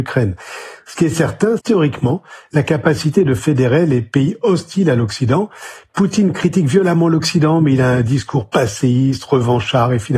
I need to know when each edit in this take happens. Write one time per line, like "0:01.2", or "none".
0:01.6